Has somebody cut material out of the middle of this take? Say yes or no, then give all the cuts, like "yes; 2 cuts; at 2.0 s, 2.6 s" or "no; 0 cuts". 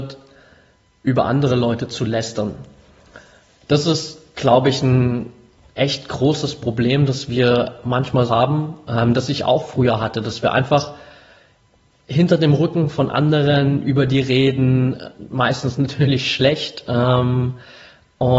yes; 1 cut; at 8.3 s